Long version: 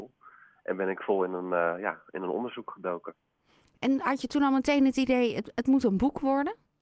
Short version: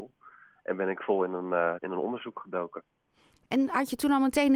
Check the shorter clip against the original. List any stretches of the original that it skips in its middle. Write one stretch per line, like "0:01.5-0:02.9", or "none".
0:01.8-0:02.1